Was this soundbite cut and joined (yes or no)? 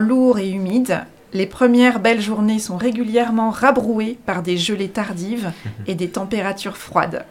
no